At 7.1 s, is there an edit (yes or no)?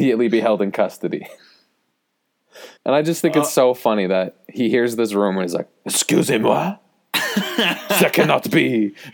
no